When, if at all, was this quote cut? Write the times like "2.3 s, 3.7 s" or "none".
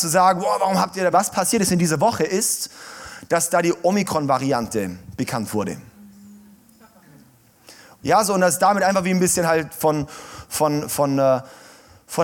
1.1 s, 8.0 s